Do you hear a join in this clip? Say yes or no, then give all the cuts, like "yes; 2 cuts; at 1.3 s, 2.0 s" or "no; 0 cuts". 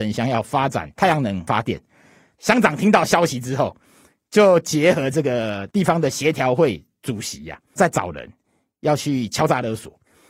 no; 0 cuts